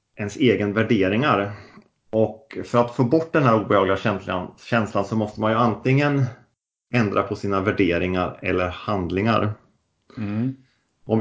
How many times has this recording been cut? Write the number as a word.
one